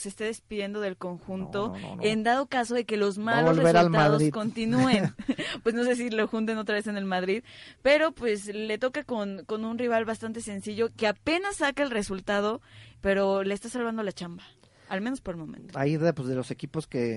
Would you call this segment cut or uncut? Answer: uncut